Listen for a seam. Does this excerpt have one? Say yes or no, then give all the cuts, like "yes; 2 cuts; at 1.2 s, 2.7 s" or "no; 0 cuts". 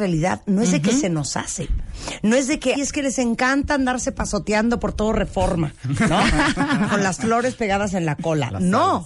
yes; 1 cut; at 2.7 s